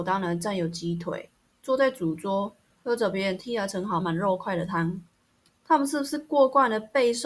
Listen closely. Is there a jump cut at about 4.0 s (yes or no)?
yes